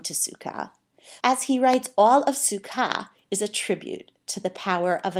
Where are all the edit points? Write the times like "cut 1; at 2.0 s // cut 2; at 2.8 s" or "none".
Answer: cut 1; at 1.2 s